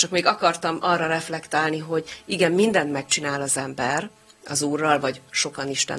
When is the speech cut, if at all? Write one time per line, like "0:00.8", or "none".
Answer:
none